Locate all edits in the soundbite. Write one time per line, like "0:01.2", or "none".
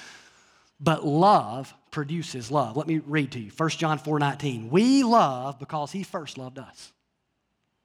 none